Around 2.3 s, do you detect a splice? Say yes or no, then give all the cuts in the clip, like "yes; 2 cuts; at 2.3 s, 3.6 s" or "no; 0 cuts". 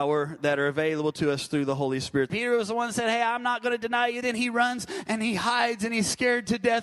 yes; 2 cuts; at 2.3 s, 4.2 s